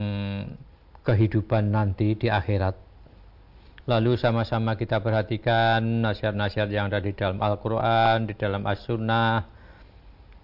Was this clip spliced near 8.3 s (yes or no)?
no